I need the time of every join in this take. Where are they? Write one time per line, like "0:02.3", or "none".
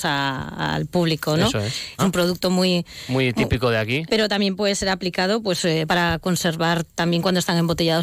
0:02.0
0:04.1
0:05.9